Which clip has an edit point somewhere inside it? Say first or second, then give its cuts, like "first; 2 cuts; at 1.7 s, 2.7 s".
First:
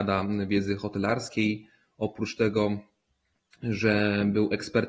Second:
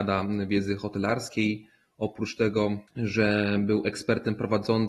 second; 1 cut; at 2.9 s